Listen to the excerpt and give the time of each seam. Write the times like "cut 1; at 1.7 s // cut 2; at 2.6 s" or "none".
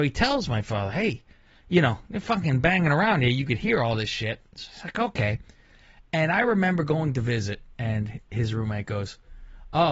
cut 1; at 7.7 s